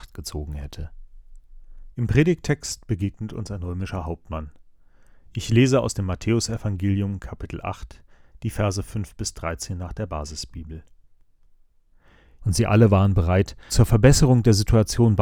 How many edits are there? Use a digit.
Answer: 3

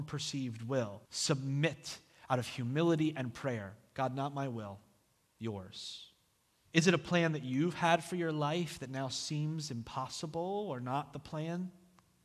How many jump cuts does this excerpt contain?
2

